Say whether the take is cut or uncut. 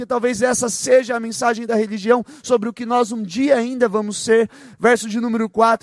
cut